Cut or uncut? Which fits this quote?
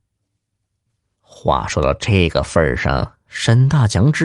uncut